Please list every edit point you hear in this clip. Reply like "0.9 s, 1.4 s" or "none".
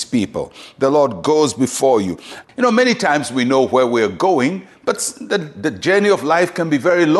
2.4 s